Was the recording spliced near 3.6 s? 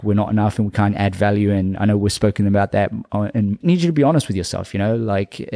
yes; 1 cut; at 3.6 s

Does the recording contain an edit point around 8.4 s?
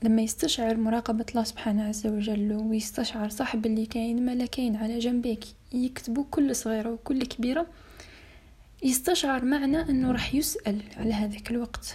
no; 0 cuts

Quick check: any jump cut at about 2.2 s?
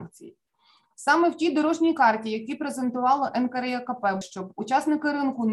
no; 1 cut; at 4.2 s

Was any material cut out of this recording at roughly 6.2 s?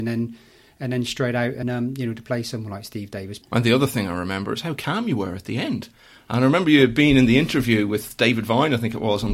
no; 2 cuts; at 1.6 s, 3.4 s

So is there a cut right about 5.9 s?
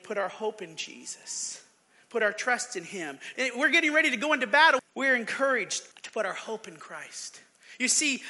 yes; 3 cuts; at 3.4 s, 4.8 s, 5.9 s

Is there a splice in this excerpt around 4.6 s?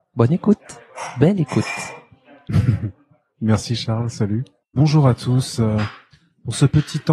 yes; 1 cut; at 4.6 s

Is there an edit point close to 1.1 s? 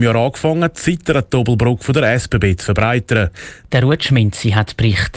no; 1 cut; at 3.6 s

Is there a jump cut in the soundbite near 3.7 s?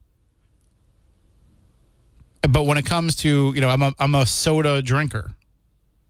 no; 0 cuts

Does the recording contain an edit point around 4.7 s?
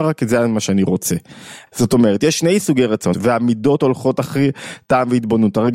no; 2 cuts; at 1.7 s, 3.1 s

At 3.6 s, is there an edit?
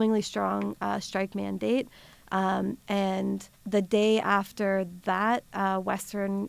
yes; 1 cut; at 3.6 s

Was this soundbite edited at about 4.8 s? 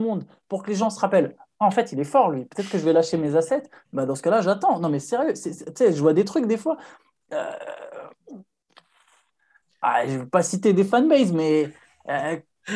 no; 0 cuts

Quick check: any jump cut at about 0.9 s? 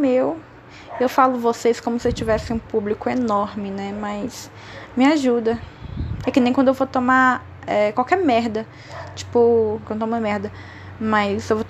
no; 2 cuts; at 6.2 s, 9.9 s

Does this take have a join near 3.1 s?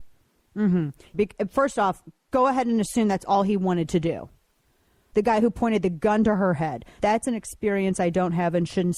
no; 3 cuts; at 1.1 s, 5.1 s, 7.0 s

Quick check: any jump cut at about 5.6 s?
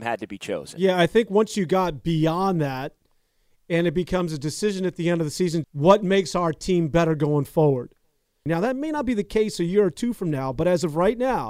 yes; 2 cuts; at 5.6 s, 8.5 s

